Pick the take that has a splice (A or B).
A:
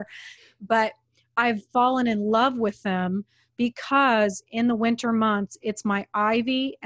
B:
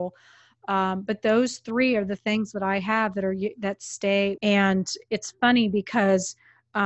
B